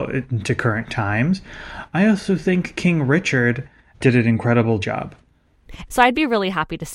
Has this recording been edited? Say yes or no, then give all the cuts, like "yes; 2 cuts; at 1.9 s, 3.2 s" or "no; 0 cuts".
yes; 2 cuts; at 3.9 s, 5.9 s